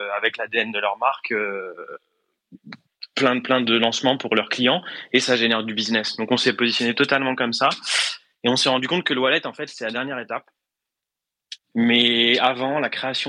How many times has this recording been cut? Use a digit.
1